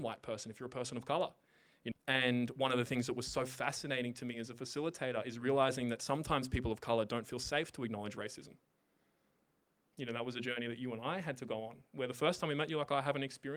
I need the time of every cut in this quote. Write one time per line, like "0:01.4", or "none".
0:01.9